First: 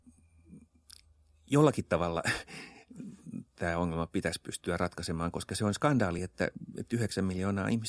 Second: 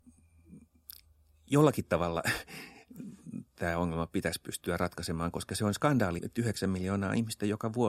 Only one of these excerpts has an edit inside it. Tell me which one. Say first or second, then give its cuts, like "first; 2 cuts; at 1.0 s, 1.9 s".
second; 1 cut; at 6.2 s